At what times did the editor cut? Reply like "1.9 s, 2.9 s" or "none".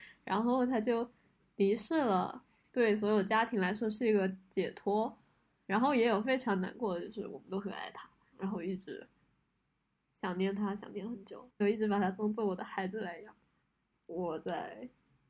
8.3 s, 11.6 s, 13.9 s

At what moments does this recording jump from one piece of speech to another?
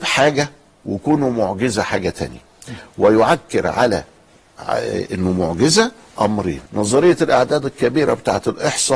6.7 s

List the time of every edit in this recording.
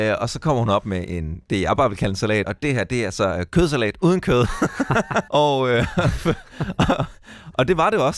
2.4 s, 5.3 s

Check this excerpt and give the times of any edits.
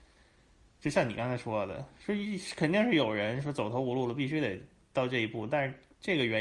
none

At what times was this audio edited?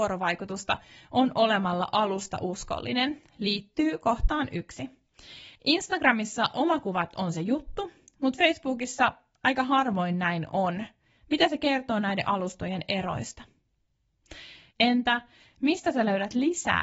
5.6 s, 14.7 s

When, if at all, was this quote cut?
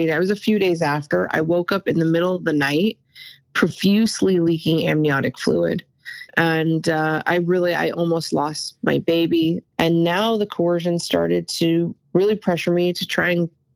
6.3 s, 9.6 s

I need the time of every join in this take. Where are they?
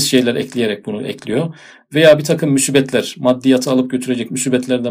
none

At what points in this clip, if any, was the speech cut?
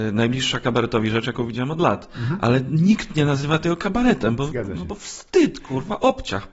none

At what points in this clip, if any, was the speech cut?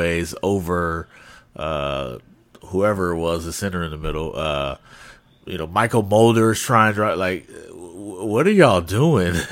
none

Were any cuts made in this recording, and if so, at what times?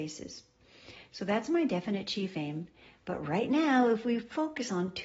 none

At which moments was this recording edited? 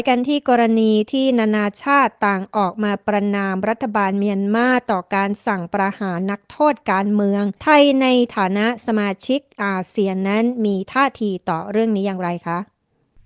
7.6 s

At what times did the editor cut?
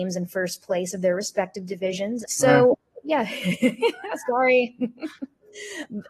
2.2 s

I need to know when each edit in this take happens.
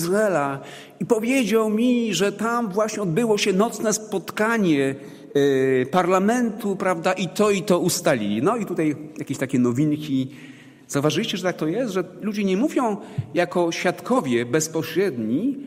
none

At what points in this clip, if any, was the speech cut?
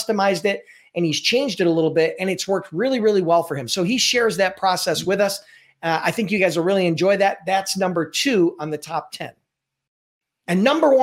none

